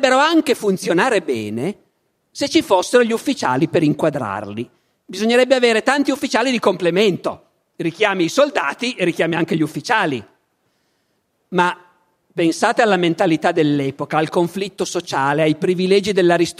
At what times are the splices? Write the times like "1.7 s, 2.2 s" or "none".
none